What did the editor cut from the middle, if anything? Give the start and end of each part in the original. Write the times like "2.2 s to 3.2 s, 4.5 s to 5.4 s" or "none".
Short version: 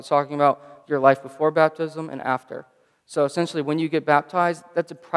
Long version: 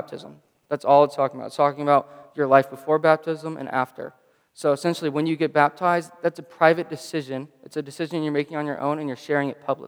none